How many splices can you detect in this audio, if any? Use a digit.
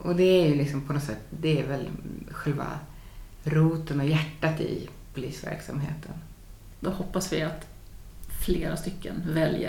1